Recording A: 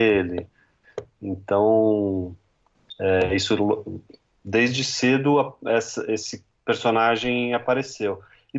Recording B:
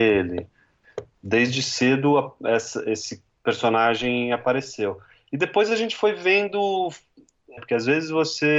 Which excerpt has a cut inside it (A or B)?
B